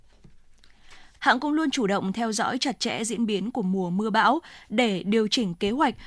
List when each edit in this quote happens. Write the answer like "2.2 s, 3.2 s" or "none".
1.2 s